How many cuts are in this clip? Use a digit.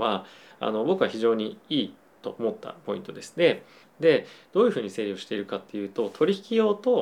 1